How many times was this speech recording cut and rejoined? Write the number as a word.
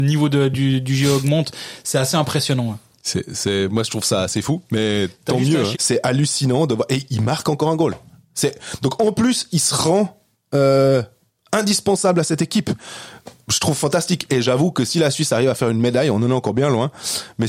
one